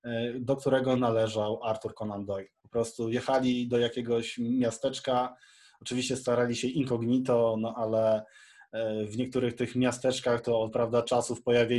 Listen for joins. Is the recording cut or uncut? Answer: cut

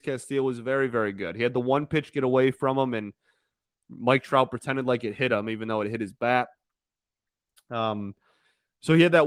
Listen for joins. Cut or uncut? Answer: uncut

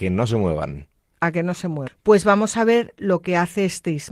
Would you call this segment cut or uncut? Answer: cut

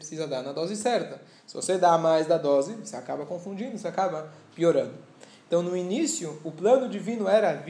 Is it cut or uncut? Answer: uncut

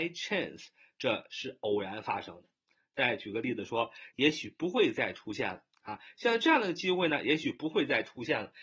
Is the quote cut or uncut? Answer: cut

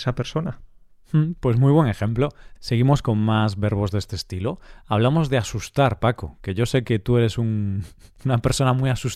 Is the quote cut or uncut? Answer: uncut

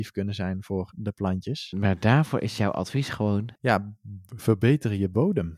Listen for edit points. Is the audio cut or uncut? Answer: cut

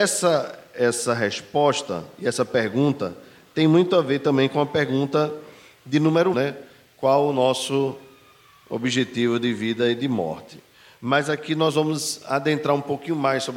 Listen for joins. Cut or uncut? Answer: cut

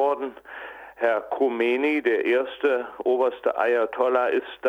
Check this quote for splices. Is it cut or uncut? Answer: uncut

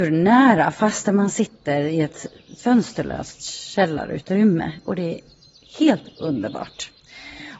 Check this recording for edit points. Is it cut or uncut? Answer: uncut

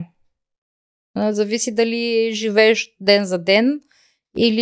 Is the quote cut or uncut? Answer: uncut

